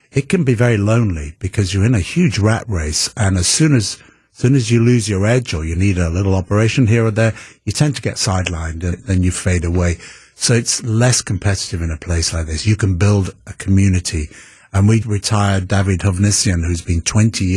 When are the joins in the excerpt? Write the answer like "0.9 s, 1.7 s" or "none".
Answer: 8.9 s, 15.0 s